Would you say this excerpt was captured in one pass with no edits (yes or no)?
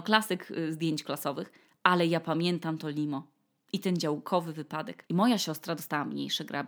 no